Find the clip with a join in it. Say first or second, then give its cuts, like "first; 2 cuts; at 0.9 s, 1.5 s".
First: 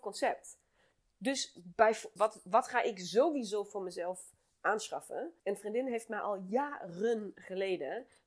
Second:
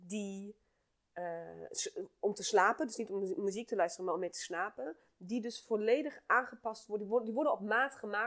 first; 2 cuts; at 2.2 s, 5.4 s